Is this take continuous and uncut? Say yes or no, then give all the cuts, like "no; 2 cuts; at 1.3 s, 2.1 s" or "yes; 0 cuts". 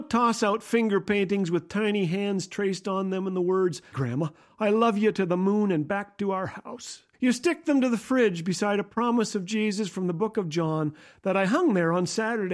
no; 2 cuts; at 3.9 s, 7.1 s